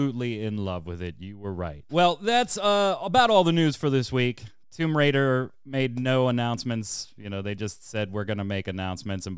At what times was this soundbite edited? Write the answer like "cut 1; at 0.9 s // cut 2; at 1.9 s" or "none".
cut 1; at 1.9 s

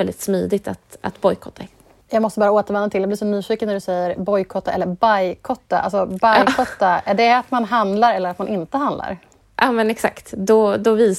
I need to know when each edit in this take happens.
none

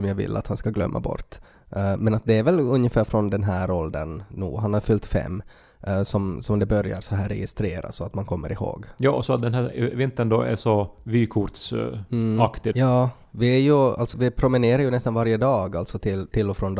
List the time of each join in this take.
cut 1; at 12.7 s // cut 2; at 14.1 s

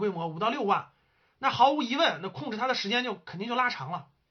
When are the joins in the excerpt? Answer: none

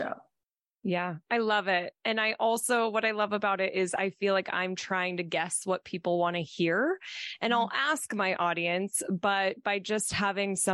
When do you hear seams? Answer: none

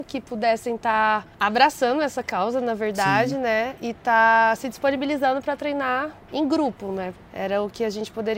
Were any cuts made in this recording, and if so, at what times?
cut 1; at 1.3 s // cut 2; at 7.2 s

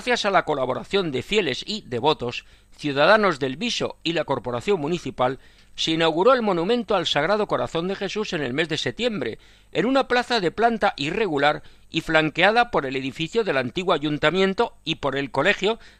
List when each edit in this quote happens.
cut 1; at 5.6 s

